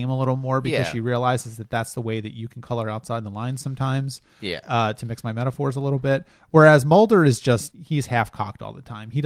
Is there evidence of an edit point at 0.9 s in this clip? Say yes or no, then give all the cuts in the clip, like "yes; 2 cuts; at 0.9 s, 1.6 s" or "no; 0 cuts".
no; 1 cut; at 7.7 s